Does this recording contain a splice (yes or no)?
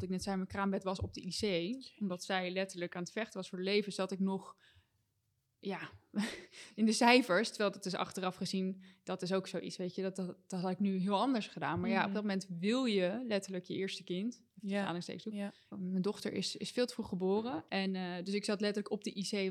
yes